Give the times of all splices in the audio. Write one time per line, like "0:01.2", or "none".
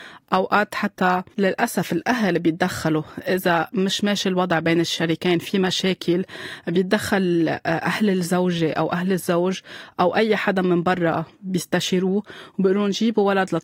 0:01.3
0:11.3